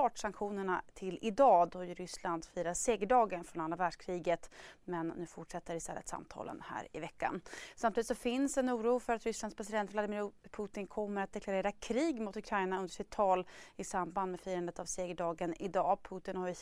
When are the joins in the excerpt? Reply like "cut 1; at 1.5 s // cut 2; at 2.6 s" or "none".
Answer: none